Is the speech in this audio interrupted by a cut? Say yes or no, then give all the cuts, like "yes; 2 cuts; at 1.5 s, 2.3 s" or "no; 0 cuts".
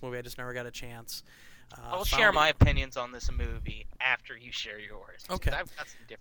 no; 0 cuts